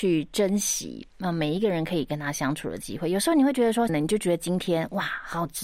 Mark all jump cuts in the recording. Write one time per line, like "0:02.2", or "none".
0:03.9